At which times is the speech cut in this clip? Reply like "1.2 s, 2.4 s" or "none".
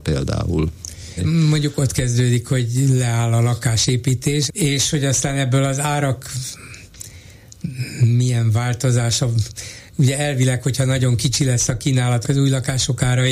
1.2 s, 4.5 s, 12.2 s